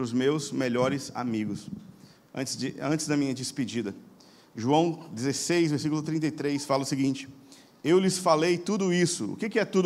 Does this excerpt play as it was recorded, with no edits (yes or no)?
yes